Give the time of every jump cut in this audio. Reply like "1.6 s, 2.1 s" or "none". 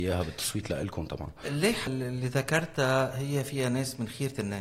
1.9 s